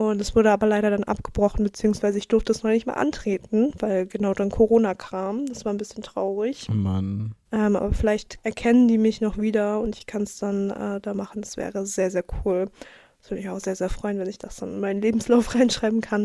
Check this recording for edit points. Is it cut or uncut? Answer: uncut